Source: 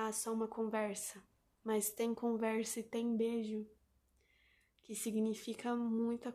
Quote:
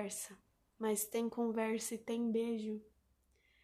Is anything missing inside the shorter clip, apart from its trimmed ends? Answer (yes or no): no